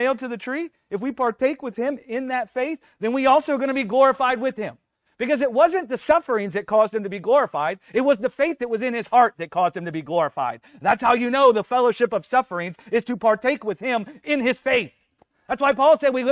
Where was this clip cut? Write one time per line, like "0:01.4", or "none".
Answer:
none